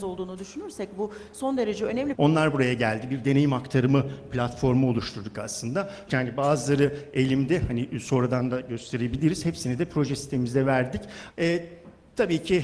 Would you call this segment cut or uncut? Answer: cut